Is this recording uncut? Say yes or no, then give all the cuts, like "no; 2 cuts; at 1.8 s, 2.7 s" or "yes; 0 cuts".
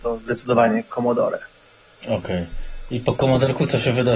yes; 0 cuts